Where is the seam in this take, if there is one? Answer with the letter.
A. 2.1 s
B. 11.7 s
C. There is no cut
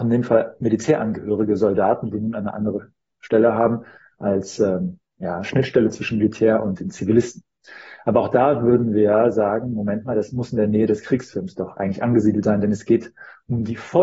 A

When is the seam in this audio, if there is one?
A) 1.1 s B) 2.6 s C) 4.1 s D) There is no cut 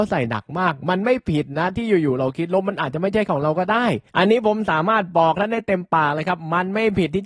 C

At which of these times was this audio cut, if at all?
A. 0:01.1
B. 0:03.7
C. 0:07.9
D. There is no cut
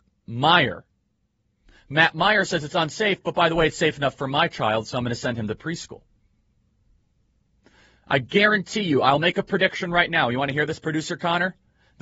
D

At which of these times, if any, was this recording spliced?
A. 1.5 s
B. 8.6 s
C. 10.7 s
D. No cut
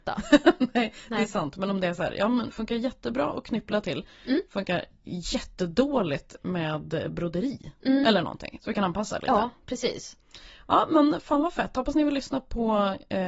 B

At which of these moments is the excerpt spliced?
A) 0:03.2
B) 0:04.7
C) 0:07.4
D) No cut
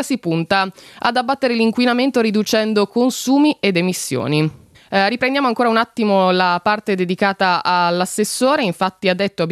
B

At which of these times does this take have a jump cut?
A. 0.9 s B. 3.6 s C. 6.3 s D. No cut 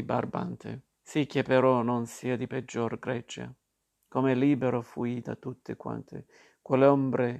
A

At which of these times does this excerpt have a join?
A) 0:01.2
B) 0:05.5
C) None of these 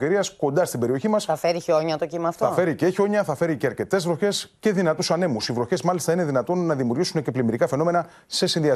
C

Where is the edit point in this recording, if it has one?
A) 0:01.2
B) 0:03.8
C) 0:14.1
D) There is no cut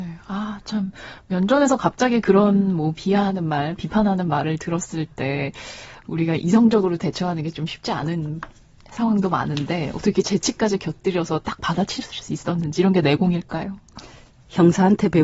B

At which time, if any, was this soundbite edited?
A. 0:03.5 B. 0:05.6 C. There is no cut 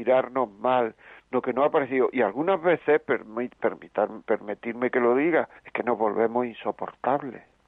B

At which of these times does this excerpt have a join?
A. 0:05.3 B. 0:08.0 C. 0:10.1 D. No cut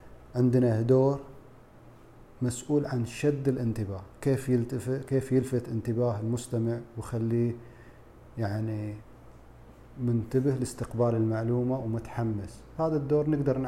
D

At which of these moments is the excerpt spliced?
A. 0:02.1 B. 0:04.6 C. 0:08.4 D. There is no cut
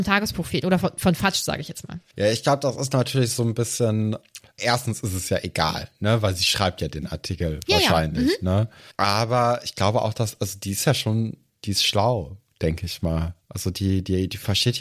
B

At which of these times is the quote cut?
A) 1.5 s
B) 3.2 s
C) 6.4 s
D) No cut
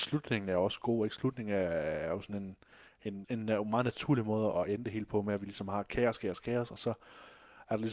B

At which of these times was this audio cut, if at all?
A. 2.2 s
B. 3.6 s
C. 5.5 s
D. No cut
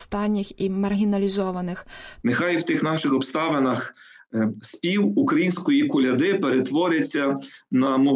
A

